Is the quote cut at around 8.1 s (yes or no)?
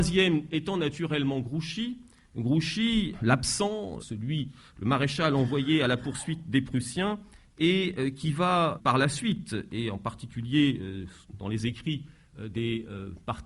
no